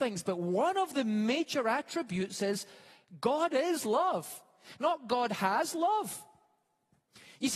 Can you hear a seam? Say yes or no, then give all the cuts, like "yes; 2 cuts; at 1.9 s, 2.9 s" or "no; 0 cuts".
no; 0 cuts